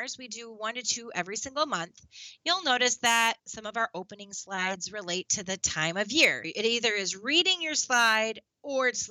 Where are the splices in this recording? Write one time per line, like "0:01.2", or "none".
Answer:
0:03.4
0:06.4

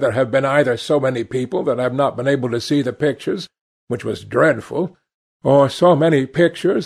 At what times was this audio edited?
none

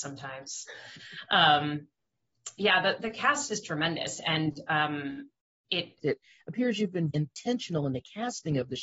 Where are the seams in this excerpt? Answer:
0:06.0
0:07.1

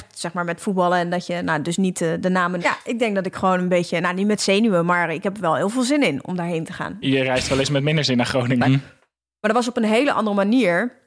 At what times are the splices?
0:02.6
0:07.0
0:08.6

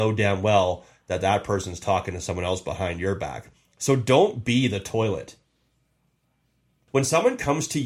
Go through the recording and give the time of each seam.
none

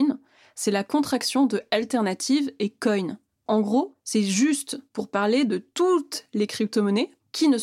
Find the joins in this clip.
none

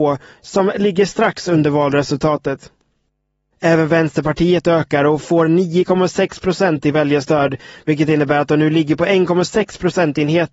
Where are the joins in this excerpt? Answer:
none

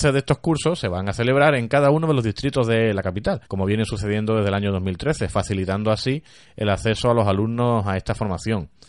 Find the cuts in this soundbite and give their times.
0:03.5

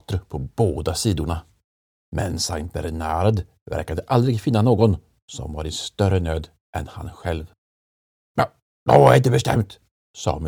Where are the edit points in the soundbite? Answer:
0:02.0

